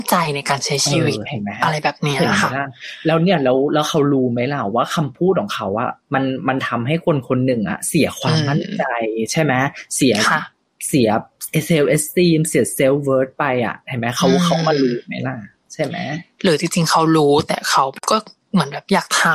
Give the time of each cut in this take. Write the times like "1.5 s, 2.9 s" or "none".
6.0 s